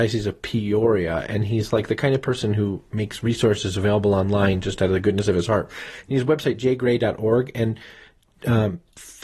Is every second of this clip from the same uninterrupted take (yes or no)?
yes